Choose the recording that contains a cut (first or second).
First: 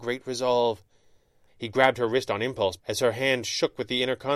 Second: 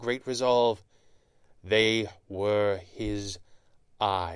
first